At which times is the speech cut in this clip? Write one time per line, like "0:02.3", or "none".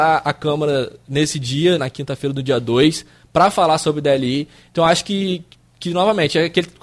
0:01.8